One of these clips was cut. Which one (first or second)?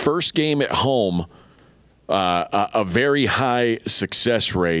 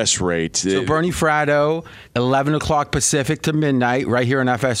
second